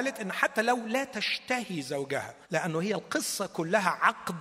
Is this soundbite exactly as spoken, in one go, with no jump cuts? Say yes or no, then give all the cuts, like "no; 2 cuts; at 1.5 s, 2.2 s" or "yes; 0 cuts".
no; 1 cut; at 2.4 s